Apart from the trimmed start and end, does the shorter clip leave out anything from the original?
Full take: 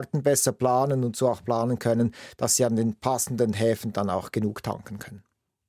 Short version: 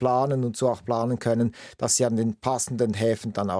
no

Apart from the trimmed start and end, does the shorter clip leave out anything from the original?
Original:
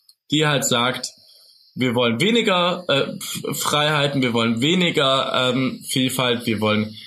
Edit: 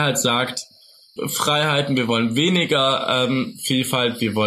yes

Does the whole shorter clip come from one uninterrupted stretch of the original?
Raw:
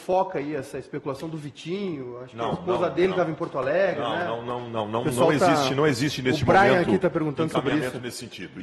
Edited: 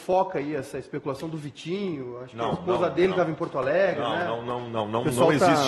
yes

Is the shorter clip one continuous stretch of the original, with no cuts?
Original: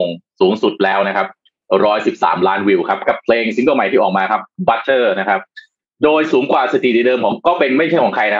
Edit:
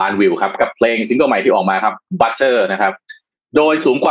yes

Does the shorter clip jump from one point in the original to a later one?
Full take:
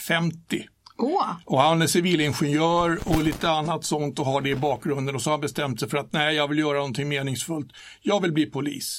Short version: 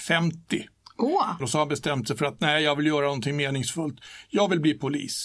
yes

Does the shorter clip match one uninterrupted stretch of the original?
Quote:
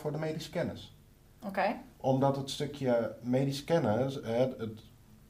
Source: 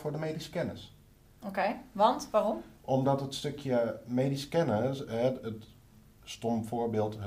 no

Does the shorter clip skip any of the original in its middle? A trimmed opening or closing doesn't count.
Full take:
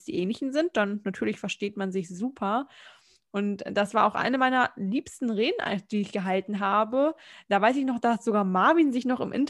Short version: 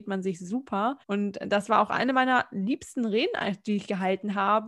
yes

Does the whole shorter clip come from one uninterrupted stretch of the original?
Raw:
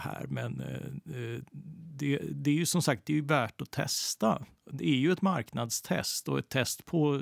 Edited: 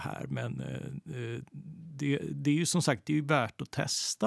yes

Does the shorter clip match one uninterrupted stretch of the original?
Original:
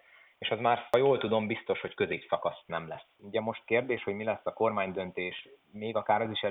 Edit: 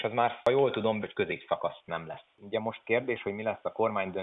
no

